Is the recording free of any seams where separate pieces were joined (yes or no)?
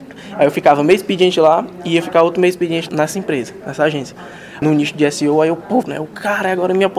no